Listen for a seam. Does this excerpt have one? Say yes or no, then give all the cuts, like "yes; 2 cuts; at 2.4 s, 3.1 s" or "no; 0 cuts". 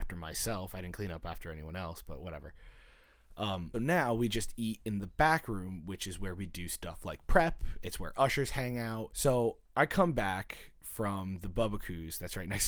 yes; 2 cuts; at 3.7 s, 9.1 s